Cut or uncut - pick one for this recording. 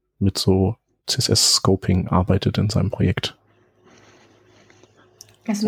cut